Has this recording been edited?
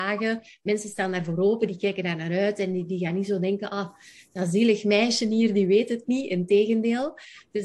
no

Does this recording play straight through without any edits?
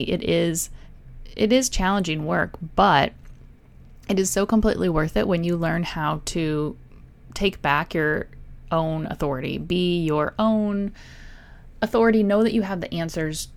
yes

